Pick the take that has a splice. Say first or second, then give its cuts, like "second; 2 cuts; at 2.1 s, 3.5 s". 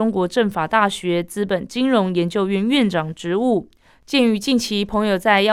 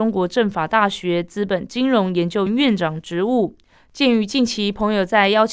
second; 1 cut; at 2.5 s